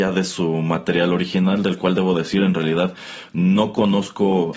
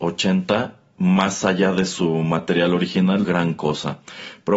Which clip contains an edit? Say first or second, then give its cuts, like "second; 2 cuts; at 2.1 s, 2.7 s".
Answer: second; 1 cut; at 3.2 s